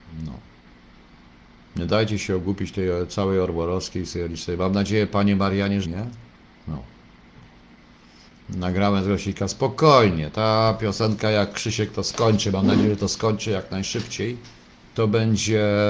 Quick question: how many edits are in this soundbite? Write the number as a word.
one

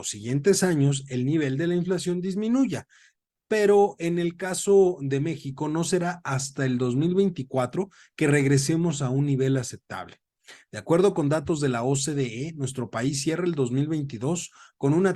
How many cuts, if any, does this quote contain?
zero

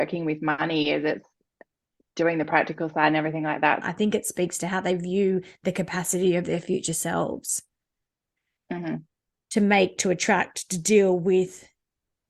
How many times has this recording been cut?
one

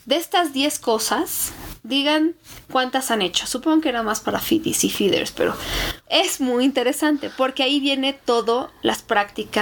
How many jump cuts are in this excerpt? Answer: one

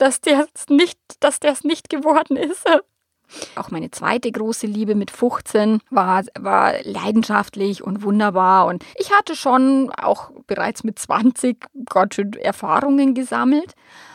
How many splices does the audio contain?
three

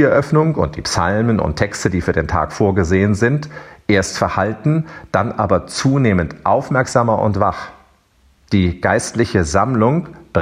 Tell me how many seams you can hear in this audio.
zero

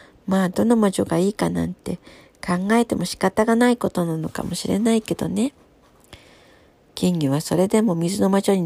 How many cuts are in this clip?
zero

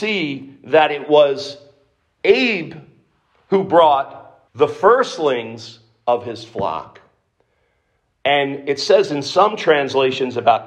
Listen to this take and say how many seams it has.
one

